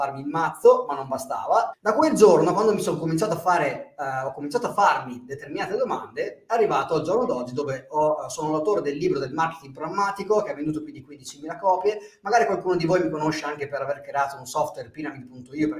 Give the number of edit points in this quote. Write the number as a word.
one